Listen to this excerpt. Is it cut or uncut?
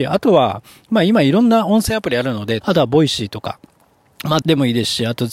cut